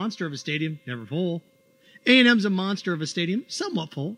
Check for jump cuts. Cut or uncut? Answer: uncut